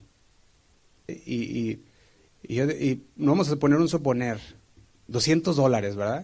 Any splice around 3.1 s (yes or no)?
no